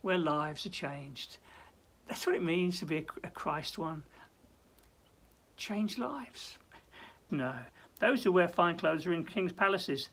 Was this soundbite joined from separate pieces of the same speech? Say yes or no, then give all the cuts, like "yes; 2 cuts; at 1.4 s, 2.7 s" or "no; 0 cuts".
yes; 1 cut; at 7.3 s